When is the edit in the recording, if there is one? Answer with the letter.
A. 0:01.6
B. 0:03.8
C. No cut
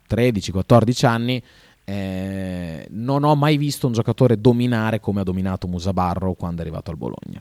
C